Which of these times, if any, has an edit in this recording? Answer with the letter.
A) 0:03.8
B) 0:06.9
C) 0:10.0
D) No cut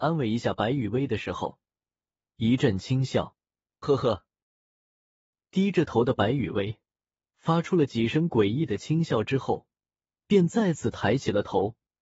A